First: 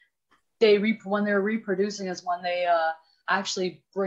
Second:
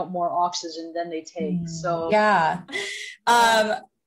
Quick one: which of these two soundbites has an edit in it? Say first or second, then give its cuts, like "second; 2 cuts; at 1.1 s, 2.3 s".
second; 1 cut; at 2.7 s